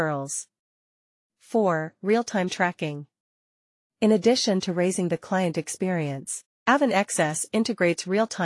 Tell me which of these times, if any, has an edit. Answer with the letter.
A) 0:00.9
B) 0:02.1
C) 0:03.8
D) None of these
D